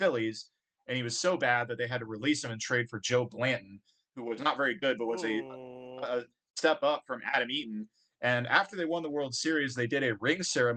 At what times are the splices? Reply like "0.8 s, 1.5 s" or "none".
none